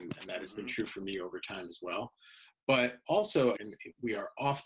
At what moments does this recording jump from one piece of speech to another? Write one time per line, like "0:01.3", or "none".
0:03.6